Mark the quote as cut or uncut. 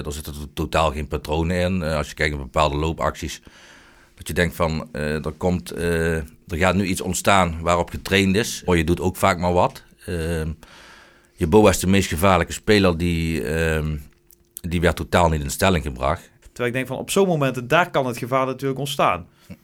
cut